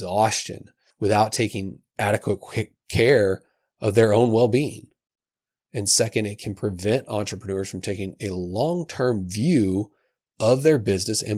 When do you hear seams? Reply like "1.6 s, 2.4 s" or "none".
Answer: none